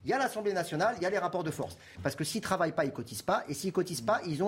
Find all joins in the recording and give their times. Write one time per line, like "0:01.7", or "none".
0:01.9